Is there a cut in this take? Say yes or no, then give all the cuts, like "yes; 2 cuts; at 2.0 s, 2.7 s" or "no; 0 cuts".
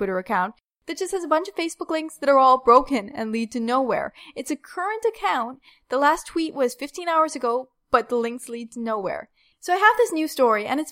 yes; 1 cut; at 9.5 s